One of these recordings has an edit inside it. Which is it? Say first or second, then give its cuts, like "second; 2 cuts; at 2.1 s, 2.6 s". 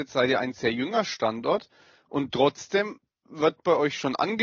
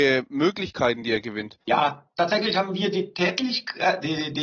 second; 1 cut; at 1.6 s